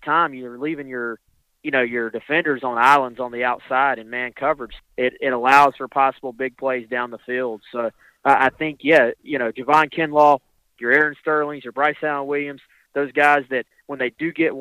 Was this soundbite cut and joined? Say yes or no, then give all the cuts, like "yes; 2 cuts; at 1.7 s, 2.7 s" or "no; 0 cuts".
yes; 1 cut; at 4.8 s